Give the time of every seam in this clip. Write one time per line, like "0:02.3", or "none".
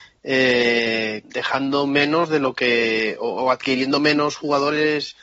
0:01.2

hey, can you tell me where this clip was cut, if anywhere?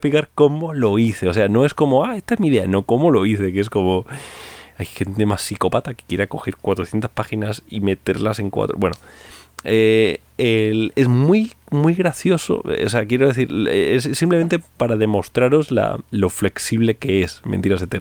none

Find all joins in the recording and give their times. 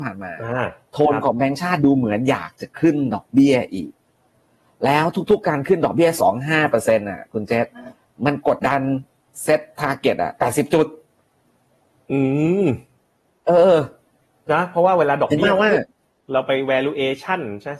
0:06.2
0:08.6

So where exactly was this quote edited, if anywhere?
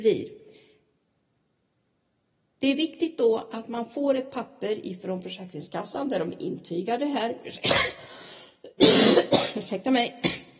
none

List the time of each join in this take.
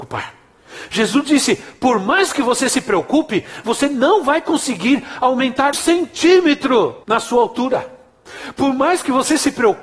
0:05.7
0:07.0

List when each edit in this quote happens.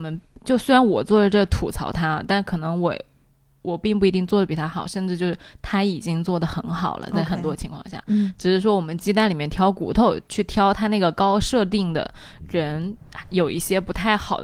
none

